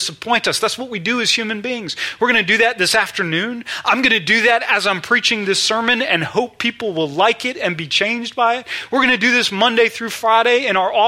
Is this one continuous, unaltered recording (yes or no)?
yes